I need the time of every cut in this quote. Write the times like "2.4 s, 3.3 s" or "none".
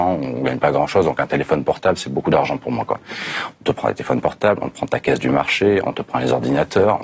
none